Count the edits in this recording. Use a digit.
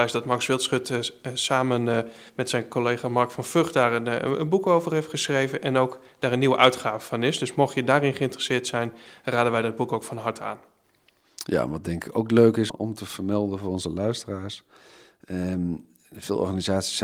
1